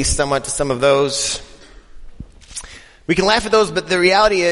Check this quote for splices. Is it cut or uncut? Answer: uncut